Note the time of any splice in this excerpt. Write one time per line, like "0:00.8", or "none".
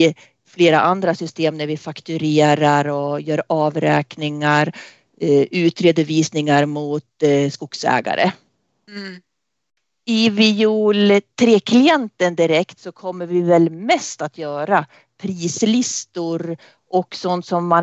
none